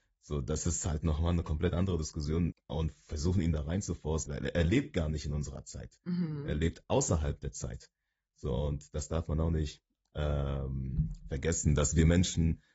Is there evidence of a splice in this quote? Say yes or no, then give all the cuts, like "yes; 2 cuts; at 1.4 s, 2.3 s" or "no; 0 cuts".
yes; 2 cuts; at 2.5 s, 4.3 s